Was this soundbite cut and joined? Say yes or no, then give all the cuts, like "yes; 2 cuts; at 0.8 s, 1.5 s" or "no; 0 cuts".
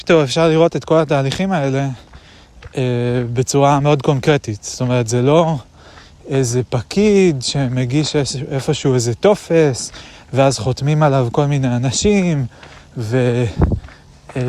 no; 0 cuts